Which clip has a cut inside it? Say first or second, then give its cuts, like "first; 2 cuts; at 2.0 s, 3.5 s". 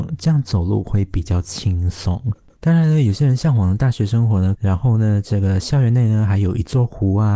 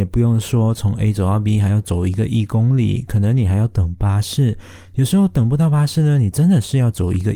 first; 2 cuts; at 2.6 s, 4.6 s